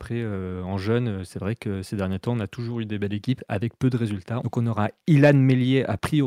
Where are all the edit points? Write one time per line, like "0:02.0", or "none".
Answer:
0:04.4